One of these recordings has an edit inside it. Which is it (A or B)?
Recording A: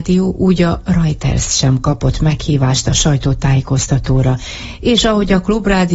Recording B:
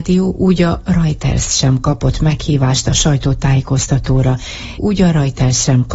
B